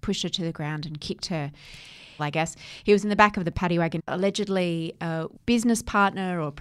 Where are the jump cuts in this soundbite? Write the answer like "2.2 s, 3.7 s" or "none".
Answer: 2.2 s, 4.0 s